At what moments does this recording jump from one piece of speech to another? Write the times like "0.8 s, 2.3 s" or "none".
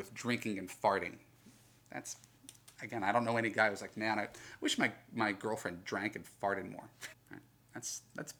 7.1 s